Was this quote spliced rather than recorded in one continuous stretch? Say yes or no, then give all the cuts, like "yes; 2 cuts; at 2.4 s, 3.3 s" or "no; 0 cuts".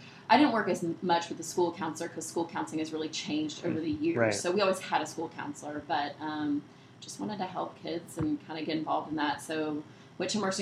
no; 0 cuts